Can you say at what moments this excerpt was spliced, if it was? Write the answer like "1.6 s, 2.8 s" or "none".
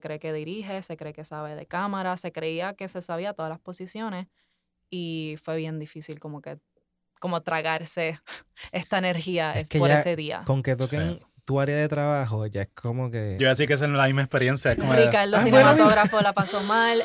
13.4 s